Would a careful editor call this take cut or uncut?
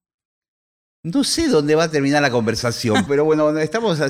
cut